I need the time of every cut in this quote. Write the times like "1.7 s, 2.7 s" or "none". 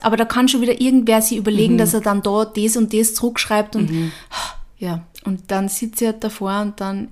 4.7 s